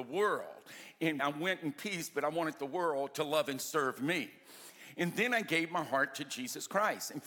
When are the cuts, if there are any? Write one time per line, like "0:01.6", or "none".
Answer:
0:01.2